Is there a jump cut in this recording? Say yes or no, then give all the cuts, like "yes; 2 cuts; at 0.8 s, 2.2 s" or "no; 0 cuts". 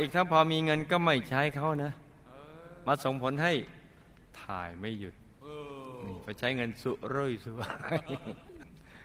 no; 0 cuts